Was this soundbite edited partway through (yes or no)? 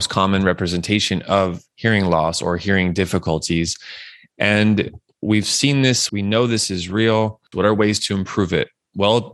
yes